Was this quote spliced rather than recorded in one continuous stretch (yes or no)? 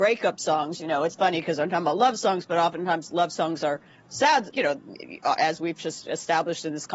yes